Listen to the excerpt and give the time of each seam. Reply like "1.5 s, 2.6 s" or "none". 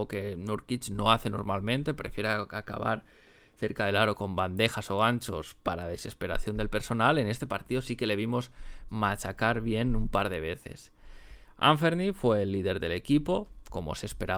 none